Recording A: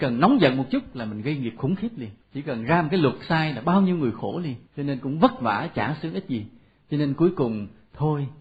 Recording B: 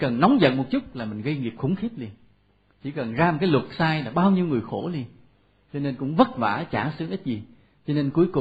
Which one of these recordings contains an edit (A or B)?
A